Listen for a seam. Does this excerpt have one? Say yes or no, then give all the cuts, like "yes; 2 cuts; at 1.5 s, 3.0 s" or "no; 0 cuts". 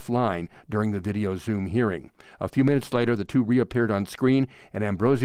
no; 0 cuts